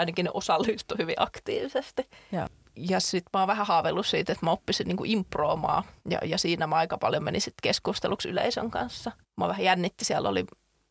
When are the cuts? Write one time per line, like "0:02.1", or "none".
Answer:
0:06.0
0:09.2